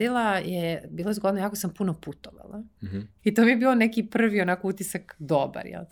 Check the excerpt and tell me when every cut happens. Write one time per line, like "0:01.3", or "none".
0:03.2

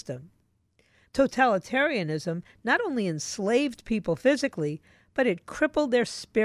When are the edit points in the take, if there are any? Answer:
0:01.1

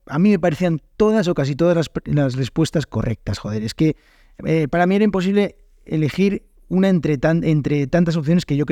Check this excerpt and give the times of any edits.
none

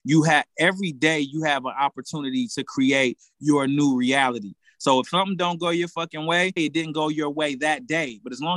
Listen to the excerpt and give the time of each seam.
0:06.6

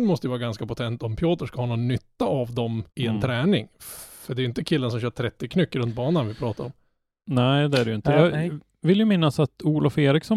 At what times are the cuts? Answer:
0:02.9

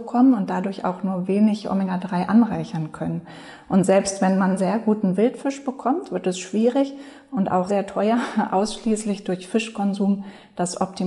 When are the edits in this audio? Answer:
0:07.7

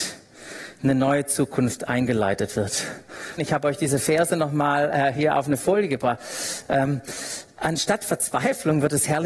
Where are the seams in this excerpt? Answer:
0:03.4

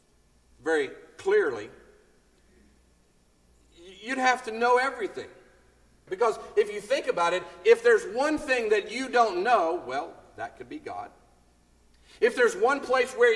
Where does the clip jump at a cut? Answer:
0:06.1

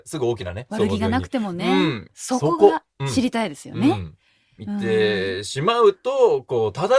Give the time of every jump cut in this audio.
0:02.1
0:04.6

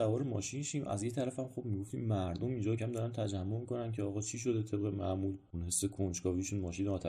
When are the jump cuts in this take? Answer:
0:02.8

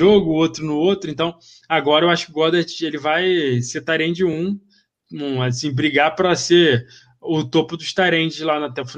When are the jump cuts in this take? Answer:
none

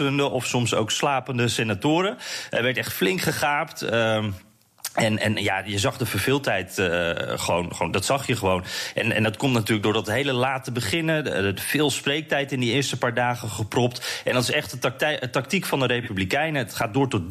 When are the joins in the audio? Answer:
none

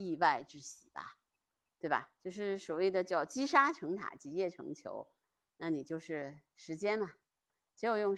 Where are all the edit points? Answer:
none

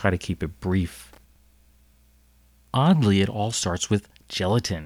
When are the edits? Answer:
none

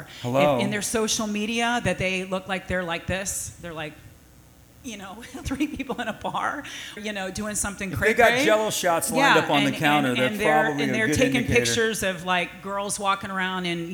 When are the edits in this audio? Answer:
0:05.4
0:07.0

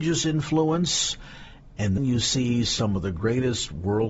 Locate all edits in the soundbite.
0:02.0

